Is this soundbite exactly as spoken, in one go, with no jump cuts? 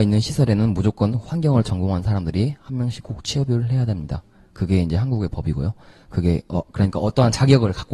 yes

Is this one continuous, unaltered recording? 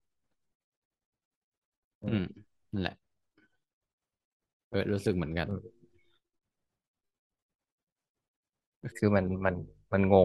no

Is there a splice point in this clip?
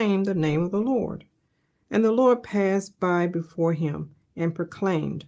no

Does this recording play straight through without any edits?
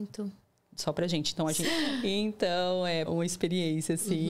no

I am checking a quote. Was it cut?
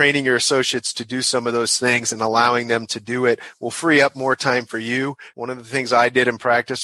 yes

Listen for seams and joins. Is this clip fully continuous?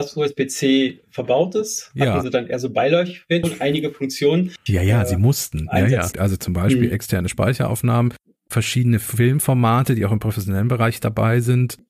no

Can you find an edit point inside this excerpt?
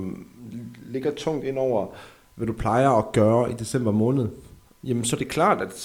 yes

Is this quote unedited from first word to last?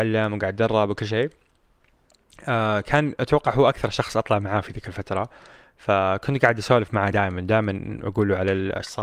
yes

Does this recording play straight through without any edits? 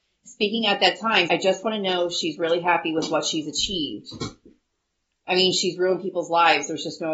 no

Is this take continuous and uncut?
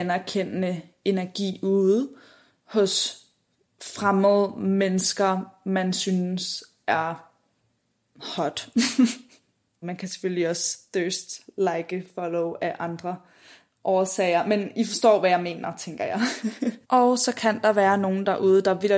no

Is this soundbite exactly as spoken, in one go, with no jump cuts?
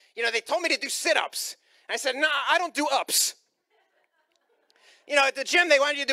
yes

